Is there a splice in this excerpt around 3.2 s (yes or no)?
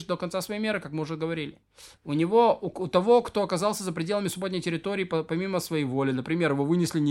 no